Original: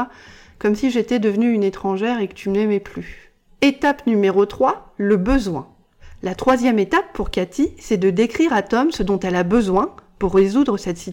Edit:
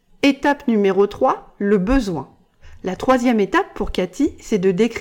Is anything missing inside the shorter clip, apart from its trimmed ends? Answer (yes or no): no